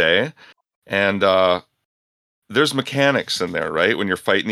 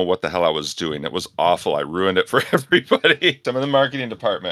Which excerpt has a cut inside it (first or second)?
second